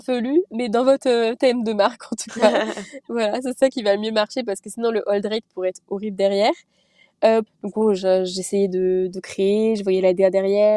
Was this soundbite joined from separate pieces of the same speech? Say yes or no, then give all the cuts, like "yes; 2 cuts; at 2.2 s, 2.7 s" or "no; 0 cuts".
yes; 1 cut; at 7.5 s